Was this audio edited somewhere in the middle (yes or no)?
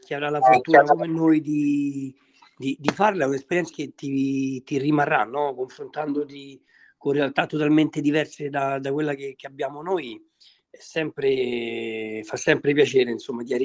yes